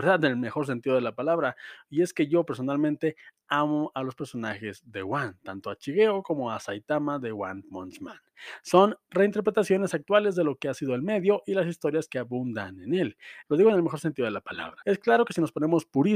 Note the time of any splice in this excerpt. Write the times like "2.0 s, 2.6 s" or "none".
13.4 s, 14.8 s